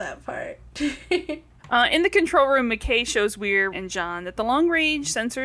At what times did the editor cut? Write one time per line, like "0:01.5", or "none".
0:01.6
0:03.7